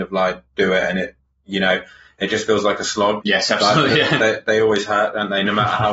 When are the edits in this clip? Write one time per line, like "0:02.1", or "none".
0:03.2